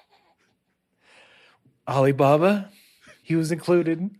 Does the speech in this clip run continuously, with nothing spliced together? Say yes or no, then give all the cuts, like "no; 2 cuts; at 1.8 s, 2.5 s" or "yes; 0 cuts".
no; 1 cut; at 3.2 s